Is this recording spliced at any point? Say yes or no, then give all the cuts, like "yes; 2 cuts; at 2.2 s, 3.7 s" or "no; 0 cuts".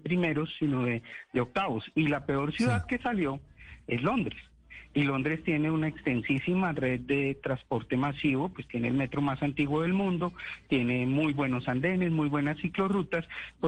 no; 0 cuts